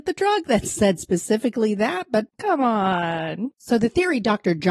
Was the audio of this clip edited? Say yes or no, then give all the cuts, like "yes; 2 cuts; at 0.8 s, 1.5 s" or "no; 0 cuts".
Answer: yes; 1 cut; at 2.3 s